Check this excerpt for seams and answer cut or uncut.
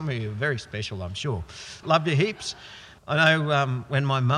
cut